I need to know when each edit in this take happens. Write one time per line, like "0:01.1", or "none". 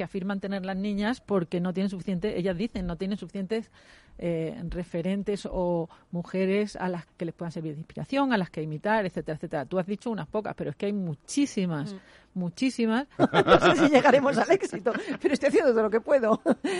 0:07.1
0:13.2